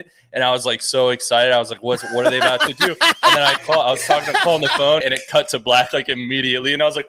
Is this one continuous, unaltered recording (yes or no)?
no